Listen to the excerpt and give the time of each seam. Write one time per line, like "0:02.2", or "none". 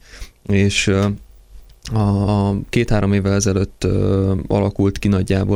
none